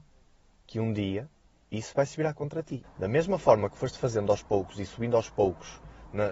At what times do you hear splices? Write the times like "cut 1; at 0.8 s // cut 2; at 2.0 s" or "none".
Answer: cut 1; at 2.8 s